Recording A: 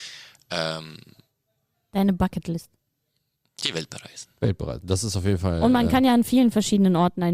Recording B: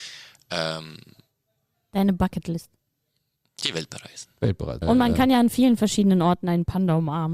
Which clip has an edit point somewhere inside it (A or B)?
B